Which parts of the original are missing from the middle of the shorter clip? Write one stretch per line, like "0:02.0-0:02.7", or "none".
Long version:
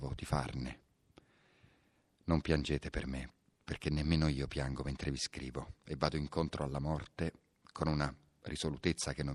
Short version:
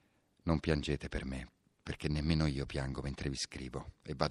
none